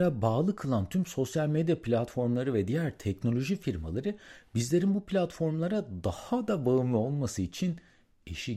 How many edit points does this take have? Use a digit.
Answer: 0